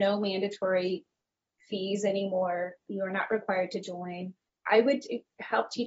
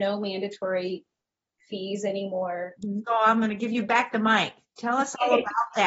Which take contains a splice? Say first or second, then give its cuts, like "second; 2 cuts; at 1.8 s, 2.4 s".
second; 1 cut; at 2.8 s